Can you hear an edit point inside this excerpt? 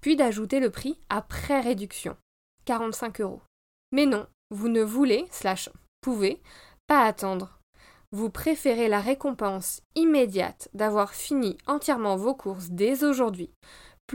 yes; 1 cut; at 3.8 s

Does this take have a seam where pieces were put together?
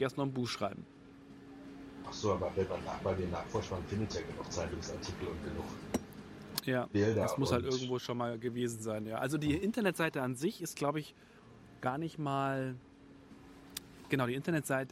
no; 0 cuts

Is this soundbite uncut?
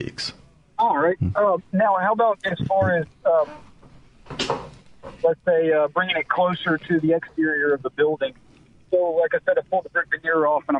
yes; 0 cuts

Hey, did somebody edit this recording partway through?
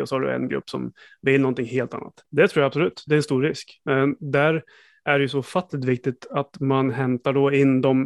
yes; 1 cut; at 2.2 s

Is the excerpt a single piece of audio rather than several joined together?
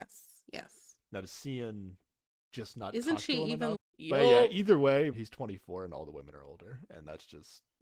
no; 2 cuts; at 3.7 s, 5.1 s

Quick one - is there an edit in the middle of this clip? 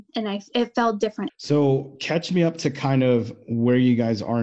yes; 1 cut; at 1.3 s

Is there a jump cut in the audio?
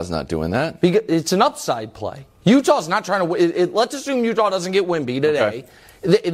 no; 0 cuts

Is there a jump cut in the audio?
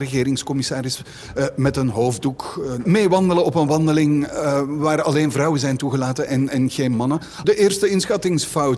yes; 1 cut; at 7.4 s

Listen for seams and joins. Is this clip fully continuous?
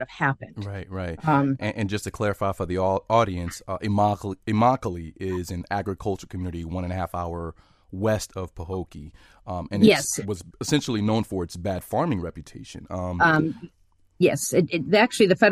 yes; 0 cuts

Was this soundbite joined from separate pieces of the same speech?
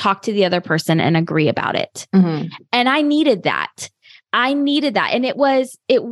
no; 0 cuts

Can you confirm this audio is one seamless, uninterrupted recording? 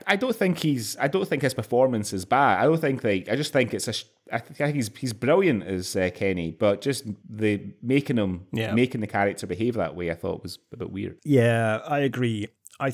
yes; 0 cuts

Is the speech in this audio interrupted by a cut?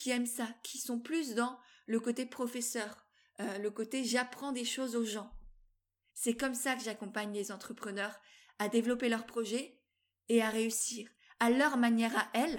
yes; 1 cut; at 6.1 s

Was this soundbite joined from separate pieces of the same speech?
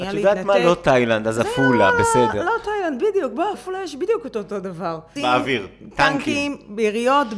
yes; 2 cuts; at 3.5 s, 5.2 s

